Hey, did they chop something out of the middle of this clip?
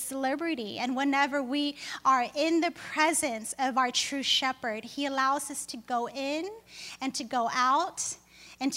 no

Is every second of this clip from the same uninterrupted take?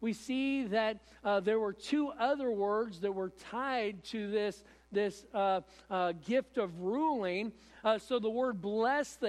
no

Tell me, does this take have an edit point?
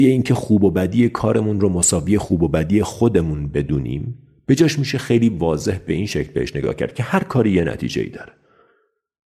no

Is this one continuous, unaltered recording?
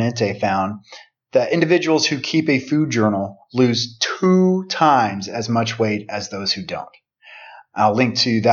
yes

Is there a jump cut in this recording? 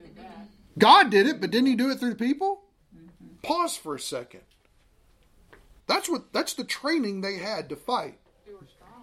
yes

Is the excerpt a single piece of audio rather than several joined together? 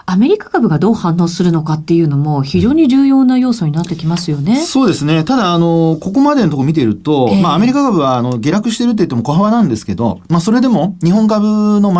yes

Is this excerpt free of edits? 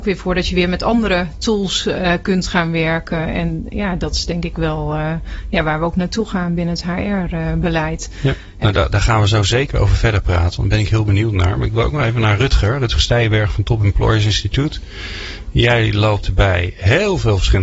no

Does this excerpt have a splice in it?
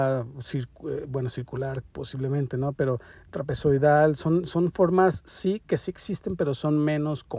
no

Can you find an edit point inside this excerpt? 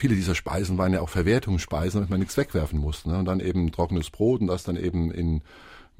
no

